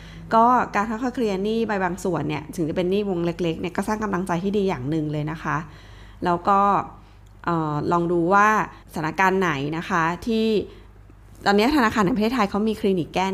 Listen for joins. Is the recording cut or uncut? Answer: cut